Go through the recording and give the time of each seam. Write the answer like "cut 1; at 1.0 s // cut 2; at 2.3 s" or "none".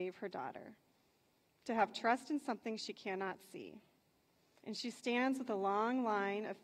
cut 1; at 4.6 s